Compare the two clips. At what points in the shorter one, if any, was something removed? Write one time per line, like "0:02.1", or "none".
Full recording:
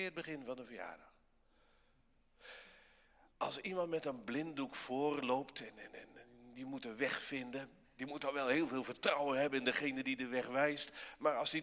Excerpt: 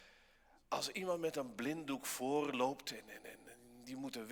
none